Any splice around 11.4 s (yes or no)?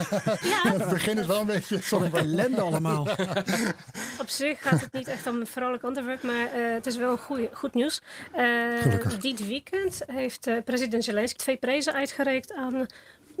yes